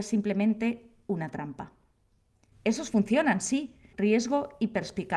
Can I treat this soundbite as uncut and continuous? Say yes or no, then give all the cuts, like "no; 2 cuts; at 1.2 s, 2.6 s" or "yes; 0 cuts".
no; 2 cuts; at 2.5 s, 3.9 s